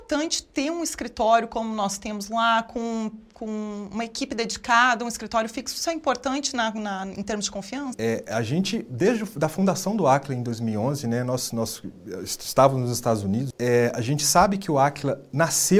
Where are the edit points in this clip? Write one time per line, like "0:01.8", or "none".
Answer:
0:07.9
0:13.5